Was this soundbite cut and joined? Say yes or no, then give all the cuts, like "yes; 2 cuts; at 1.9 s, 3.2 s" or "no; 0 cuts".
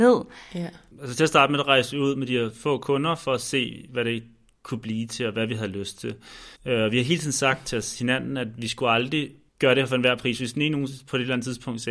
yes; 1 cut; at 6.5 s